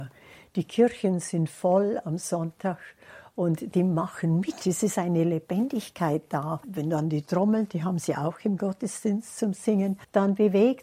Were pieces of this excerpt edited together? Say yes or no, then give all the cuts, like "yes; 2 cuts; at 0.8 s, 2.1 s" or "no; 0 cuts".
no; 0 cuts